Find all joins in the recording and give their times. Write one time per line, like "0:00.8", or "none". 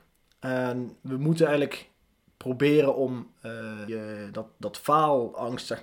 0:03.9